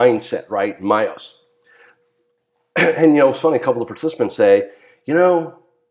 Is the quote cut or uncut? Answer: uncut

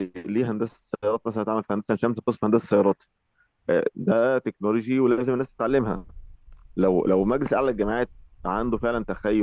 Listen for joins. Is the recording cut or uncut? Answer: uncut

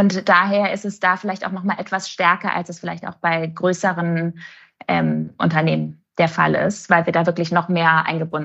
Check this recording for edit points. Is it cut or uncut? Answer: uncut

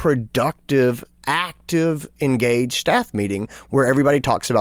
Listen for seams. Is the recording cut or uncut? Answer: uncut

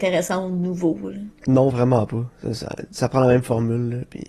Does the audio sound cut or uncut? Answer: uncut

